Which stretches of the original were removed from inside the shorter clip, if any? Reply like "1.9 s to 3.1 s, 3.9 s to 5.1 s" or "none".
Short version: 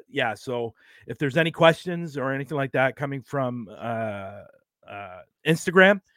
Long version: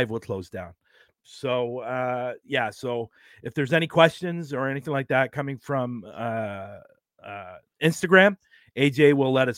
none